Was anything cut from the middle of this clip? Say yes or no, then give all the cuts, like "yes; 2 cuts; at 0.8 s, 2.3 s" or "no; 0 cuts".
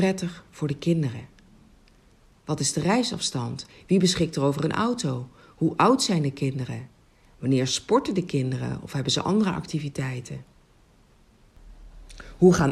no; 0 cuts